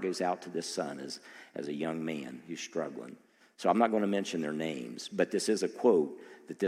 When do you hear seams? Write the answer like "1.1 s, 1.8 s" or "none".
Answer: none